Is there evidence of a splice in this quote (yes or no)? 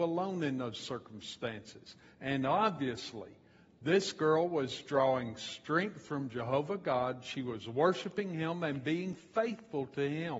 no